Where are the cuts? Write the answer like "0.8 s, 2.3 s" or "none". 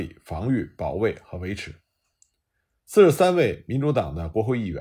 none